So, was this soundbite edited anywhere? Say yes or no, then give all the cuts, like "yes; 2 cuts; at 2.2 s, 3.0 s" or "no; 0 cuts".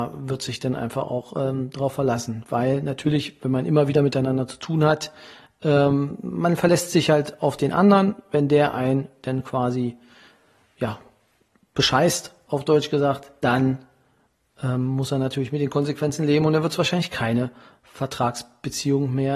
no; 0 cuts